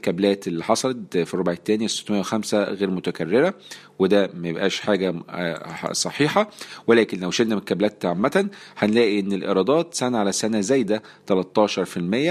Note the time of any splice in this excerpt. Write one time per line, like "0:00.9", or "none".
none